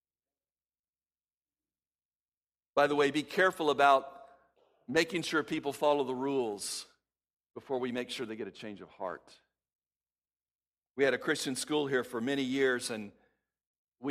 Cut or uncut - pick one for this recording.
uncut